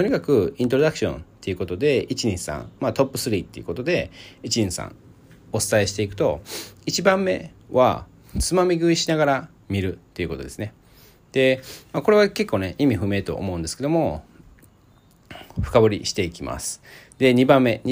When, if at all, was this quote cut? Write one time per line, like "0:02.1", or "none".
none